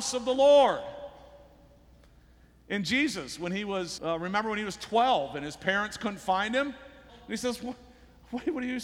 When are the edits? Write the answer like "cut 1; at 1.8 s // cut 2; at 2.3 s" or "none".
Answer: cut 1; at 4.0 s // cut 2; at 7.1 s

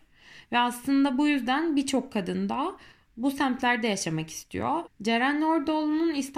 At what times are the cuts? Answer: cut 1; at 4.8 s

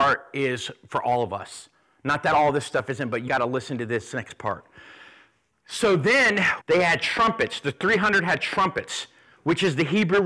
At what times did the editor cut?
cut 1; at 3.3 s // cut 2; at 6.6 s

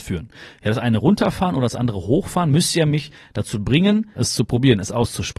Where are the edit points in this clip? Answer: cut 1; at 4.1 s

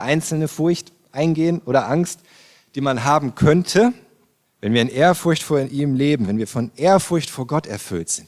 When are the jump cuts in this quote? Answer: cut 1; at 4.5 s

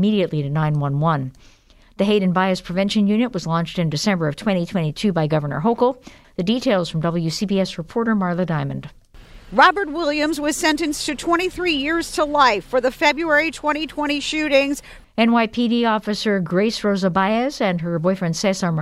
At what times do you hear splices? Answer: cut 1; at 6.2 s // cut 2; at 15.0 s

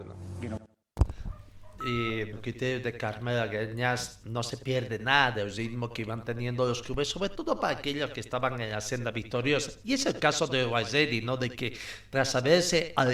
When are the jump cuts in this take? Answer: cut 1; at 2.3 s

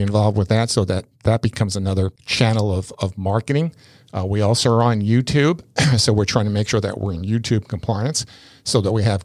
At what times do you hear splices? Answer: cut 1; at 2.2 s

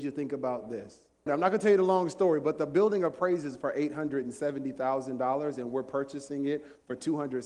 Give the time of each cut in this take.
cut 1; at 1.3 s

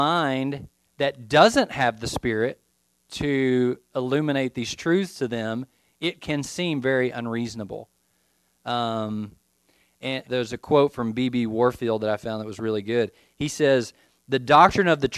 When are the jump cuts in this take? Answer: cut 1; at 10.2 s

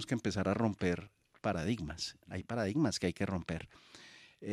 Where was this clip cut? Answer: none

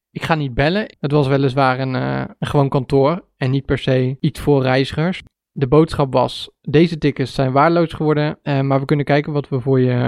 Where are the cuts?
cut 1; at 0.9 s // cut 2; at 5.3 s

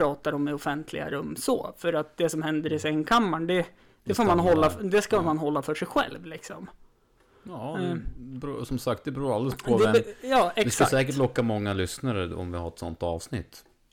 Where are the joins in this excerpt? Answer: none

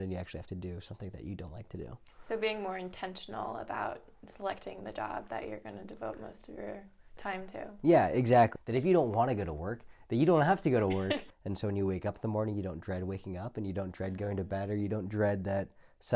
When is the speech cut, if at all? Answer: cut 1; at 8.6 s // cut 2; at 11.3 s

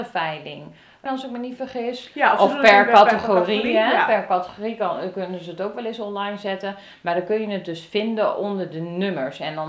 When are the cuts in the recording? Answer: cut 1; at 1.1 s

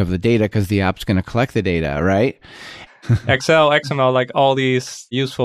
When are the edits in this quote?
cut 1; at 2.9 s

